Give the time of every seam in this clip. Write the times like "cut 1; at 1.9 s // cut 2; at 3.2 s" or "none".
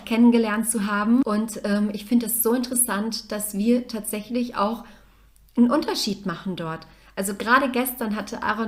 cut 1; at 1.2 s